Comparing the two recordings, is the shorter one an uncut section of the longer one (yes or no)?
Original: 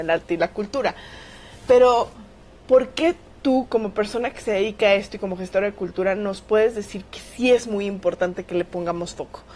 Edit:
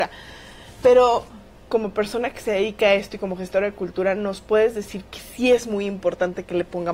no